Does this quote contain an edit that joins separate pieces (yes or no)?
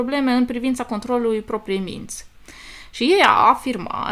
no